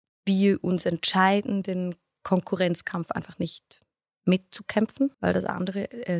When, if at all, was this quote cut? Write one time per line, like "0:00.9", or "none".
0:05.1